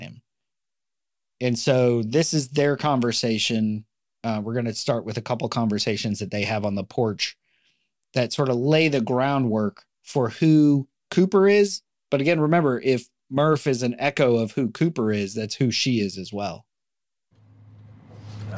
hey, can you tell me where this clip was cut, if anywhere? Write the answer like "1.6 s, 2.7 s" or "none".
none